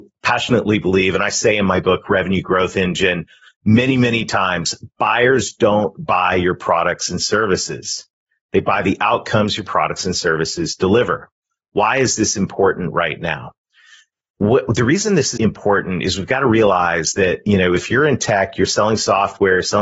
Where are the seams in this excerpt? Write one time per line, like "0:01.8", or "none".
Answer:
0:15.4